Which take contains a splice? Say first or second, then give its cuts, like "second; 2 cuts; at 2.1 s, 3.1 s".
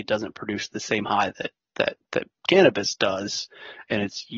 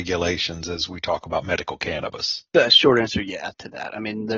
second; 1 cut; at 2.5 s